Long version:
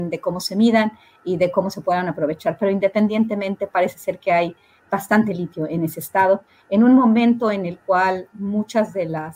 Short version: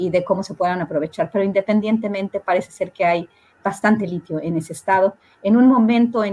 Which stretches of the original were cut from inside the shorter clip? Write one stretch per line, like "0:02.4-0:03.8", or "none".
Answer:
none